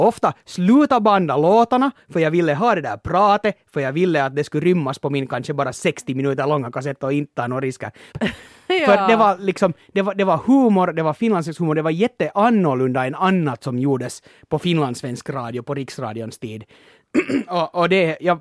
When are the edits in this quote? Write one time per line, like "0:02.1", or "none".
0:08.1